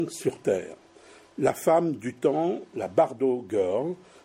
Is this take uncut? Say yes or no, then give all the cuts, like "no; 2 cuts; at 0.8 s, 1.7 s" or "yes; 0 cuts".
yes; 0 cuts